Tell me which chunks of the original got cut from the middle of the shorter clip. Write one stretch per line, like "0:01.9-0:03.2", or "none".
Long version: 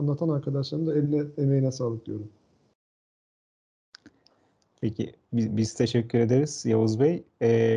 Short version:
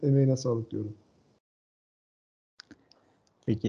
none